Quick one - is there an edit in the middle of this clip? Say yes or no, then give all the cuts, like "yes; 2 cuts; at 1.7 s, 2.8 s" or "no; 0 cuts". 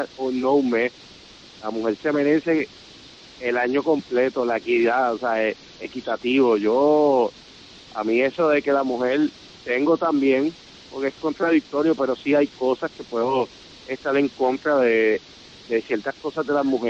no; 0 cuts